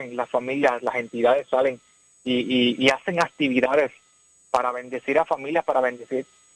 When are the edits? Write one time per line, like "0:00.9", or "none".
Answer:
none